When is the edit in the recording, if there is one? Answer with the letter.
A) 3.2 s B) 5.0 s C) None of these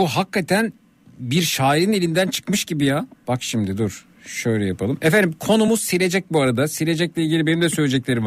A